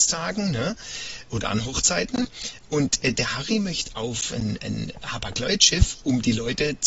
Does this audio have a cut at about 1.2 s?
no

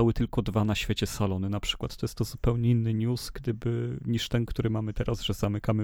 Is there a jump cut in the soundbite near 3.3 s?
no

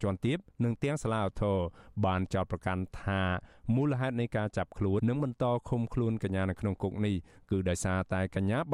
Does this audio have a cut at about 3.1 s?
no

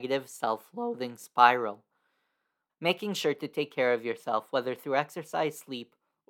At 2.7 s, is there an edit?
yes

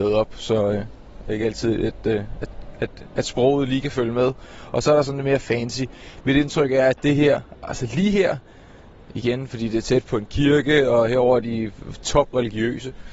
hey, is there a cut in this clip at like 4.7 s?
no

